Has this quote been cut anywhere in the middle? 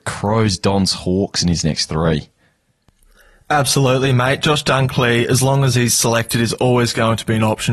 no; 0 cuts

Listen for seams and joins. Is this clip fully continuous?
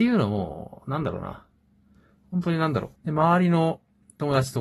no; 1 cut; at 3.0 s

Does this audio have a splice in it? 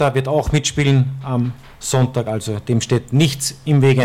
no; 0 cuts

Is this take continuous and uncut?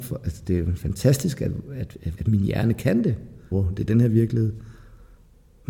no; 2 cuts; at 2.2 s, 3.5 s

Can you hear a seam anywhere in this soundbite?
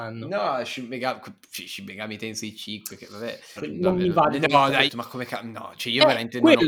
yes; 2 cuts; at 3.6 s, 4.9 s

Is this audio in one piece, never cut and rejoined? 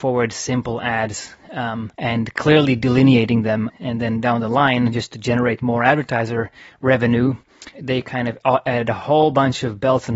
no; 3 cuts; at 1.9 s, 3.7 s, 7.7 s

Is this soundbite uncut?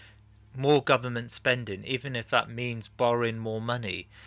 yes; 0 cuts

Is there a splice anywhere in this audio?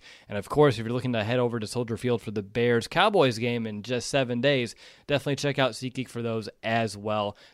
no; 0 cuts

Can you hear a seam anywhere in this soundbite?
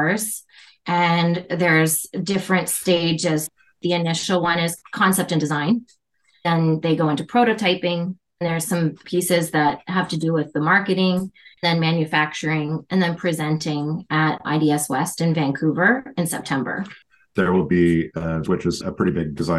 yes; 1 cut; at 18.4 s

